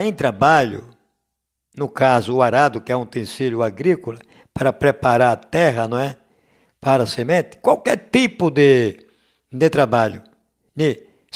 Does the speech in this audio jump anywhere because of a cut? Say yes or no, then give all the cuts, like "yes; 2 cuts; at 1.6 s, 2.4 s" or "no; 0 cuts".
no; 0 cuts